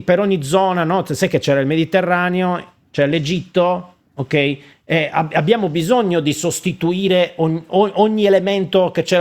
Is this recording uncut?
yes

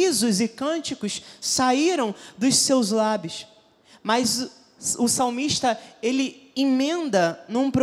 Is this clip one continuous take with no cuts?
yes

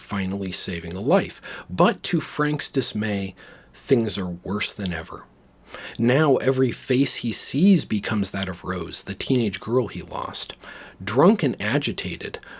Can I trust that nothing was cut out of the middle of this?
yes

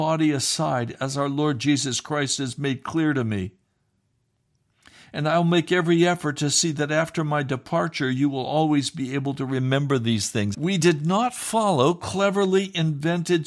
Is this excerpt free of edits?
no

